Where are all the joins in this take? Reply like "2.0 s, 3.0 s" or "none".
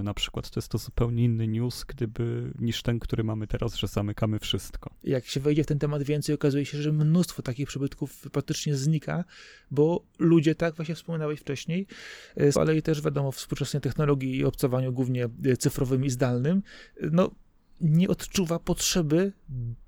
5.0 s, 12.5 s